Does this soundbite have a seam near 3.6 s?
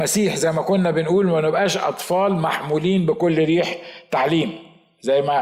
no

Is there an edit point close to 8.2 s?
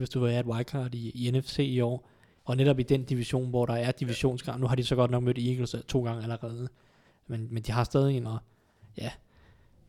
yes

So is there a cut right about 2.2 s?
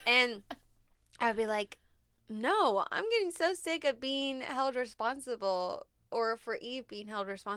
no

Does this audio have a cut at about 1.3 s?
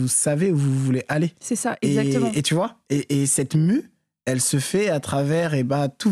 no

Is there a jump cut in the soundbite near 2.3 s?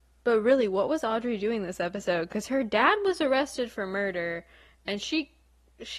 no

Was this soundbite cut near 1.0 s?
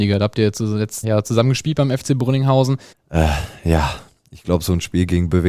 yes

